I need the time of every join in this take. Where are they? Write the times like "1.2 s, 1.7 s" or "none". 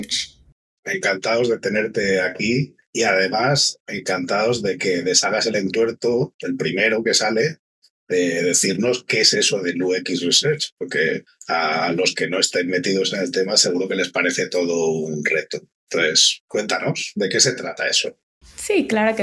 none